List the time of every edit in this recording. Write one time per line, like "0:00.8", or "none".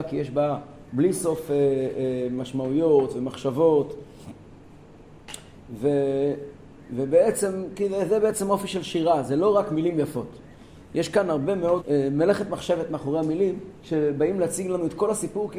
0:11.8